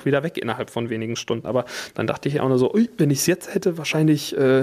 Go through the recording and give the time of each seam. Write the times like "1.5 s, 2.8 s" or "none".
1.4 s